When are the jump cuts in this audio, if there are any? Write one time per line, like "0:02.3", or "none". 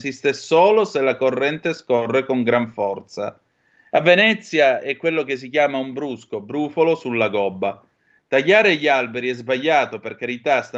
0:03.9